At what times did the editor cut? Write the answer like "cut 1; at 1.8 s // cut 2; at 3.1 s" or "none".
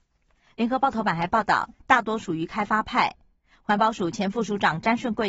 cut 1; at 1.7 s